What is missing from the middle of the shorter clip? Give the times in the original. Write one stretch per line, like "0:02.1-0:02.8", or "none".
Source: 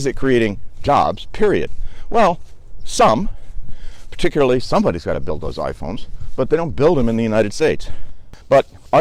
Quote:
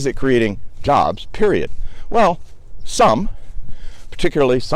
none

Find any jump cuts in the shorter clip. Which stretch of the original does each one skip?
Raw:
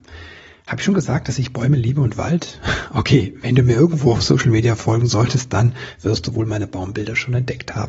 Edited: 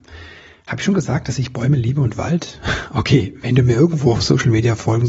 none

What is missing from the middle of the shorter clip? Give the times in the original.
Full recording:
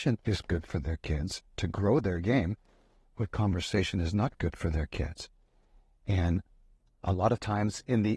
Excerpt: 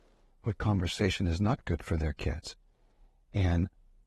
none

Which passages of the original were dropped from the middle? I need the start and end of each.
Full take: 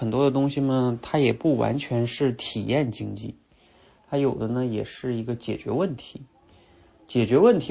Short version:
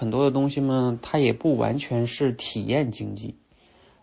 none

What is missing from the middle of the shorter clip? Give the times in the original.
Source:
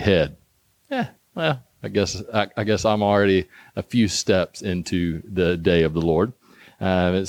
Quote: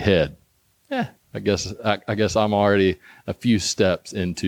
0:01.2-0:01.7

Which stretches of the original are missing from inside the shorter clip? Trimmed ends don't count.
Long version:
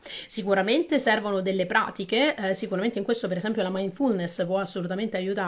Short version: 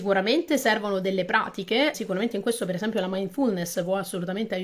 0:02.4-0:02.6

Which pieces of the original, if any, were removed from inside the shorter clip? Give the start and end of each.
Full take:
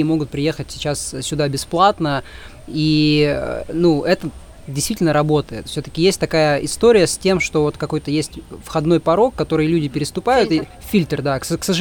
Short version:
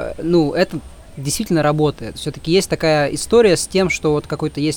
none

